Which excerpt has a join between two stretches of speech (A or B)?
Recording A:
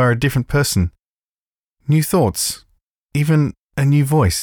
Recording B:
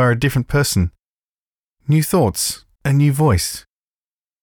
B